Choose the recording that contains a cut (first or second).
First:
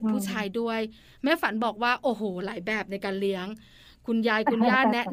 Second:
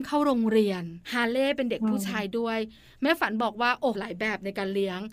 second